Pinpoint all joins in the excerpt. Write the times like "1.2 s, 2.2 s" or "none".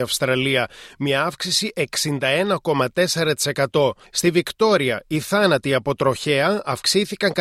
4.0 s